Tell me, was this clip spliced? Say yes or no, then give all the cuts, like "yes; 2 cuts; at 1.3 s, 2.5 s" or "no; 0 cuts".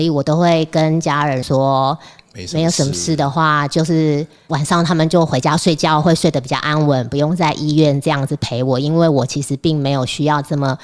no; 0 cuts